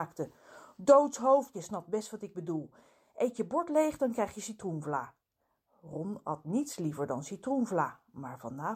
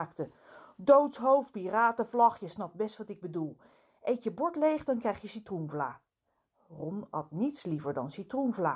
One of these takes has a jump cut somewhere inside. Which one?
first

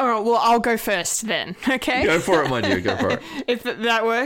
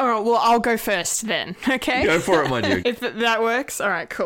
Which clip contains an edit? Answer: second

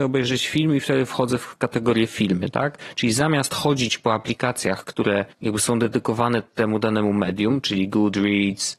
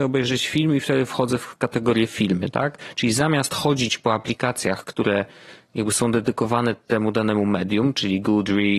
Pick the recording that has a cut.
first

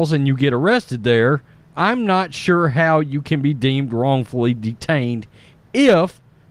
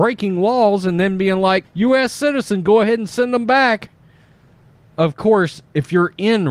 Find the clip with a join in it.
second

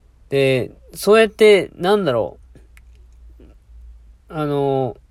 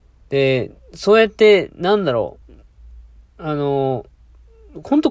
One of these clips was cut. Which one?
second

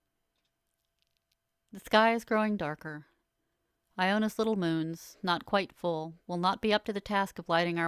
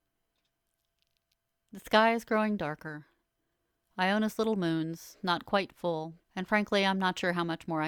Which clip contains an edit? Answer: second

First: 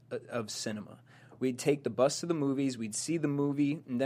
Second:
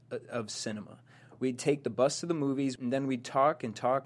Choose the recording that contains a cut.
second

